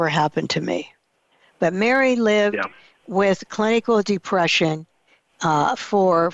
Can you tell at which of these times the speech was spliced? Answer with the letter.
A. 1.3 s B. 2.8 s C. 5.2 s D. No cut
D